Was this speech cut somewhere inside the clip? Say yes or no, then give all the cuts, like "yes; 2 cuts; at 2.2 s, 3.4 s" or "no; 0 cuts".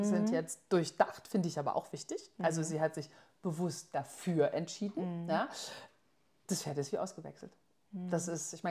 no; 0 cuts